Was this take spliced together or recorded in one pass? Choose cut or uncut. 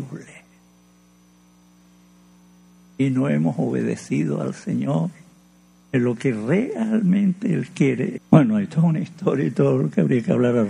cut